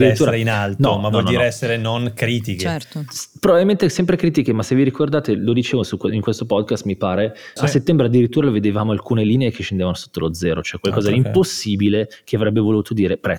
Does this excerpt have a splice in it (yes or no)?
yes